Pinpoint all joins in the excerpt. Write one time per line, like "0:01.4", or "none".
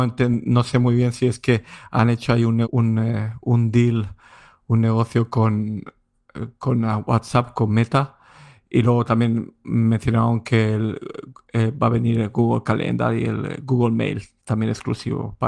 0:02.6